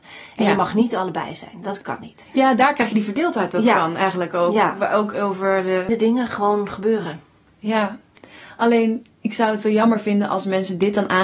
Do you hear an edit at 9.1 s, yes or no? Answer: yes